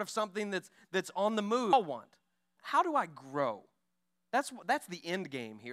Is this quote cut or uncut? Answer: cut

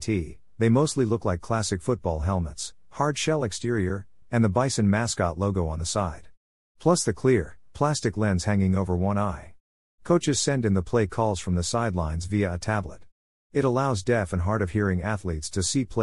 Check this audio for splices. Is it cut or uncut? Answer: cut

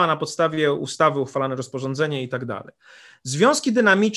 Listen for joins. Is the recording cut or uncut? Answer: uncut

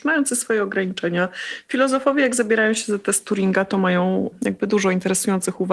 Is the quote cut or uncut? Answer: uncut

